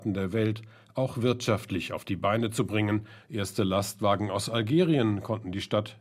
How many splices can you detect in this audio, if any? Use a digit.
1